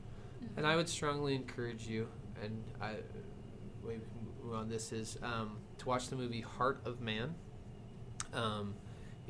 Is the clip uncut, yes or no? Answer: yes